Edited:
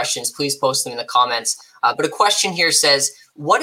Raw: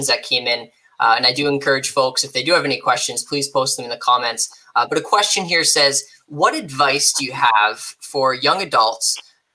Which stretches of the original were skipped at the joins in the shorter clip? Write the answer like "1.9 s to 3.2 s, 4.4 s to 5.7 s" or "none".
none